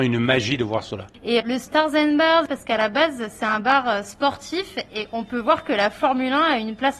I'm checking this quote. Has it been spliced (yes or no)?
yes